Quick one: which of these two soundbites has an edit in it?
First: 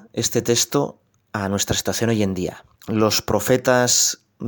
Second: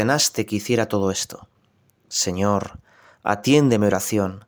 first; 1 cut; at 2.7 s

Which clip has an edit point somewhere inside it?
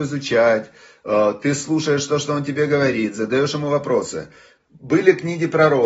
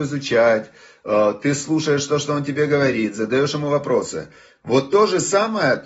first; 1 cut; at 4.6 s

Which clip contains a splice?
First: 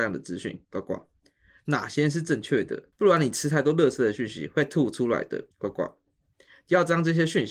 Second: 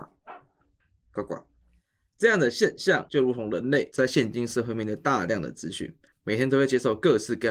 second; 1 cut; at 1.0 s

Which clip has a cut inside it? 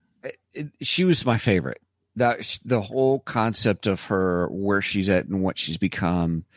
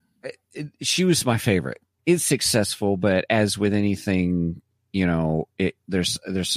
second; 1 cut; at 2.0 s

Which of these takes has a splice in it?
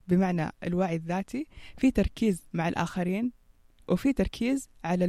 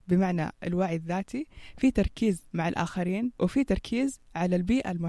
second; 1 cut; at 3.4 s

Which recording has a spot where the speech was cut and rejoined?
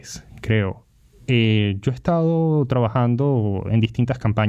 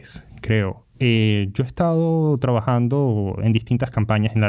second; 1 cut; at 0.9 s

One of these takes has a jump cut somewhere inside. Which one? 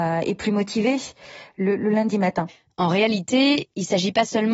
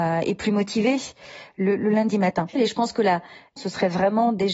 second; 2 cuts; at 2.6 s, 3.6 s

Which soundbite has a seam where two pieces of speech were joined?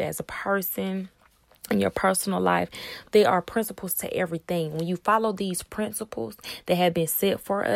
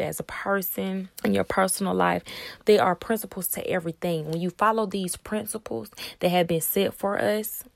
second; 1 cut; at 1.1 s

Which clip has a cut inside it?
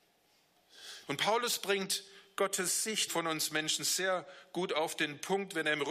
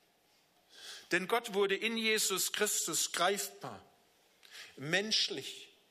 first; 2 cuts; at 1.1 s, 3.1 s

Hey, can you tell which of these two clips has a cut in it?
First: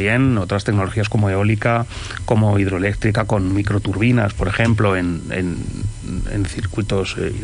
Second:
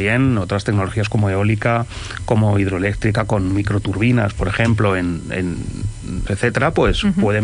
second; 1 cut; at 6.3 s

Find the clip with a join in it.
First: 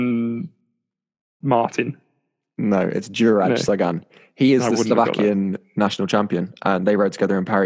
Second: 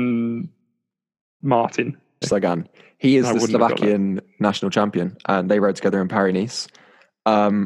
second; 1 cut; at 2.2 s

